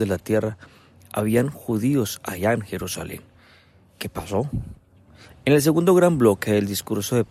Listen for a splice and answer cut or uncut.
cut